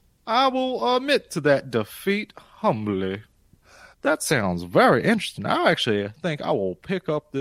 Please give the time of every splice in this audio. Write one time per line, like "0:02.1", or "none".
0:03.9